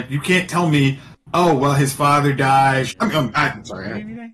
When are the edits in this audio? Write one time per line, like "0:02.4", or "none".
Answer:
0:02.9